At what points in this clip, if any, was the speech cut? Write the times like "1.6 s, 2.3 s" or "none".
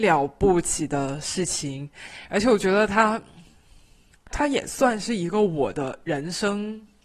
4.3 s